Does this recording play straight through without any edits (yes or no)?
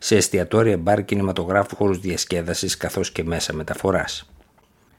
no